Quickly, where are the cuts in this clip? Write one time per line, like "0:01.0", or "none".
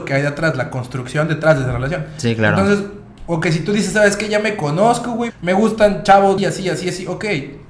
0:05.3
0:06.4

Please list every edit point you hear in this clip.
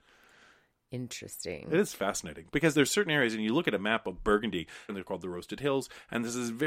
0:02.7
0:04.9

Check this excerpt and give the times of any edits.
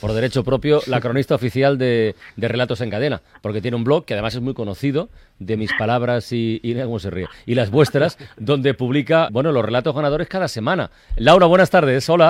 0:09.3

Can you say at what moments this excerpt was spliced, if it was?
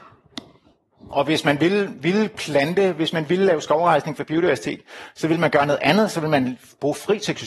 none

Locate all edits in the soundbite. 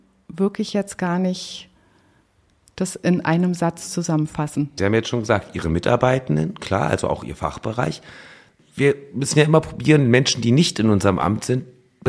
0:04.8
0:08.6

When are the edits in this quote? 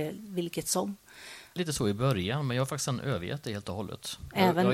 0:01.6

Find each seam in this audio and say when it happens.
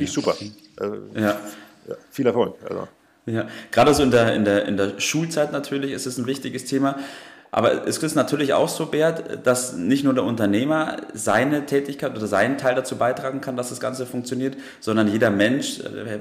none

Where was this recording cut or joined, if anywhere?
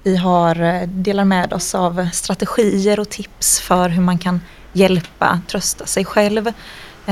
0:05.5

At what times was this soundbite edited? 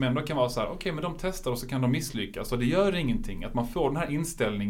none

